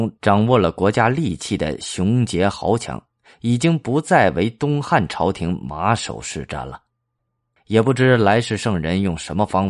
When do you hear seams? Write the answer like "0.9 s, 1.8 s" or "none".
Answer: 7.6 s